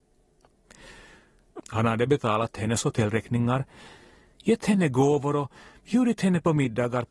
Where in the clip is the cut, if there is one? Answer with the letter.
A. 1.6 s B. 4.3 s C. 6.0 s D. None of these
A